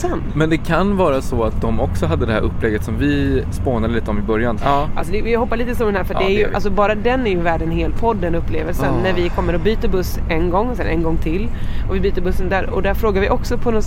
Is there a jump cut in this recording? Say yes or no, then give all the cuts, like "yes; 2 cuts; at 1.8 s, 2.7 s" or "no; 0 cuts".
yes; 2 cuts; at 3.5 s, 4.6 s